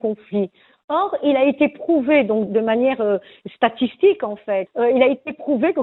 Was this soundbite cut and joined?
yes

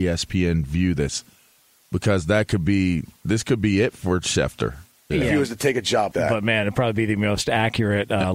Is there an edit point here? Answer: yes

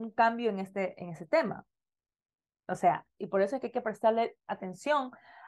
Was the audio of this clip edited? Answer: yes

